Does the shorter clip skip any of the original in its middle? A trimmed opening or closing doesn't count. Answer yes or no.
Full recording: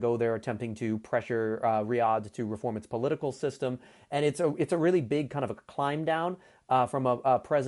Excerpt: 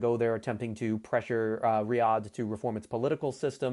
no